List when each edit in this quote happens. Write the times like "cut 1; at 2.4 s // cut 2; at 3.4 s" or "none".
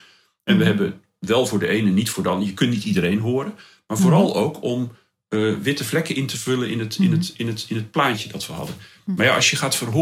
none